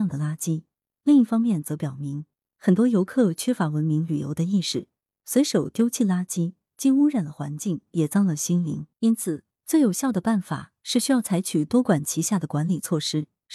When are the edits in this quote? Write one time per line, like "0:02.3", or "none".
0:08.9